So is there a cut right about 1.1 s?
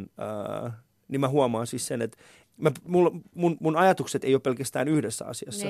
no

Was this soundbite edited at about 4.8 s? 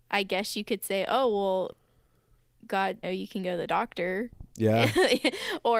no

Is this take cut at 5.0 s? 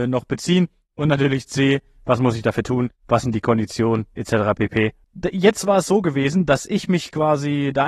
yes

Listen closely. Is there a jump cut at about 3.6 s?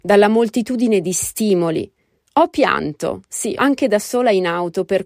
yes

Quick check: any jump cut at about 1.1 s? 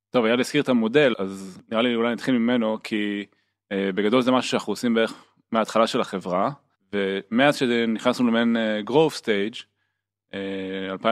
yes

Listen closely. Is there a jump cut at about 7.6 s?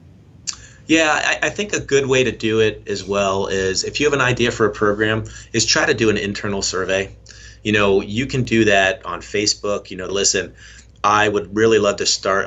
no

